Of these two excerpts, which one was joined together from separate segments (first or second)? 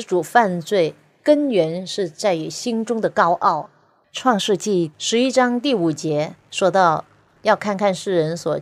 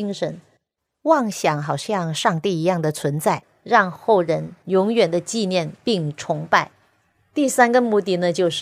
first